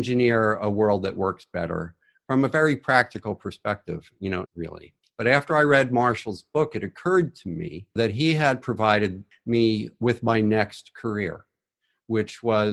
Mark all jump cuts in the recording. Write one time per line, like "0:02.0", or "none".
0:04.4